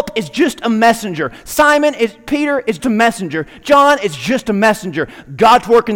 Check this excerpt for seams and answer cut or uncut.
cut